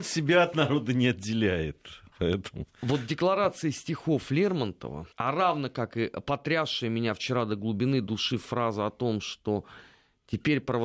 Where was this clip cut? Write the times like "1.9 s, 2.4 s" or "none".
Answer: 2.1 s, 5.1 s